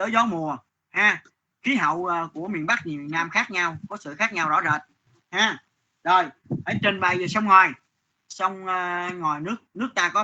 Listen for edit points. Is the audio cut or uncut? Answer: uncut